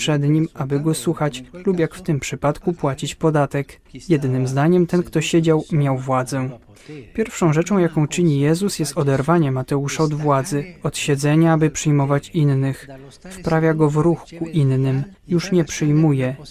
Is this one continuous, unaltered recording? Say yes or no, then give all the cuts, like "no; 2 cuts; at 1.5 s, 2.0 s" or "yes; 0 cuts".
yes; 0 cuts